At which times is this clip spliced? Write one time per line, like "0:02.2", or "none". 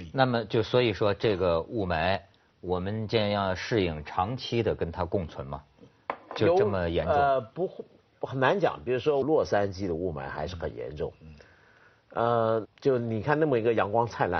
0:09.2
0:12.6